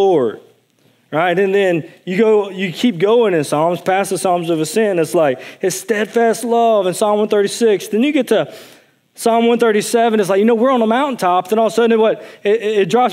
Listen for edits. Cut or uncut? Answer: uncut